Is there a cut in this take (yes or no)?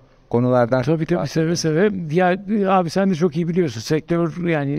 no